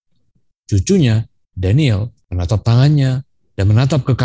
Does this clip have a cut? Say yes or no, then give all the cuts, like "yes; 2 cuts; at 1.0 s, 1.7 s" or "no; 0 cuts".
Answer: yes; 1 cut; at 2.2 s